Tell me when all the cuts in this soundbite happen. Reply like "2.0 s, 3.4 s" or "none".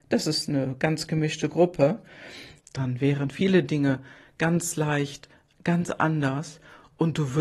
2.6 s